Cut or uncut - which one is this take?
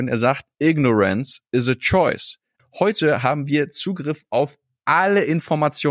cut